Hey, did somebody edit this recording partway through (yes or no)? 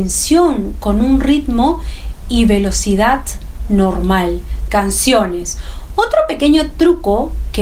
yes